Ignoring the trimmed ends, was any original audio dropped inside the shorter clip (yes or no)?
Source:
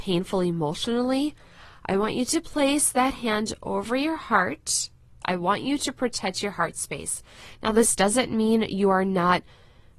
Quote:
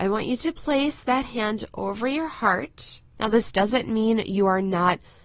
yes